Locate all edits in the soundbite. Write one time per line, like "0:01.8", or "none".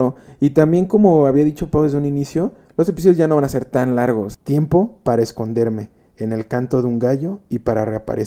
0:04.3